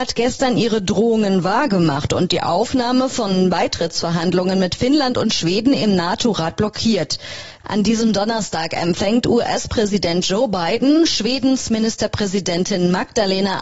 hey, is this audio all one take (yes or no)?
no